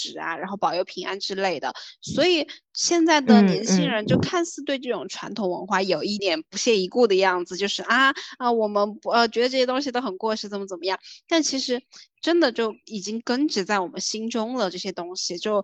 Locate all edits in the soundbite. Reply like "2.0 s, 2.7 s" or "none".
6.2 s